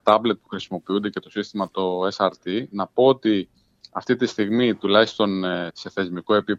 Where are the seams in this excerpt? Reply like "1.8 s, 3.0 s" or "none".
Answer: 5.7 s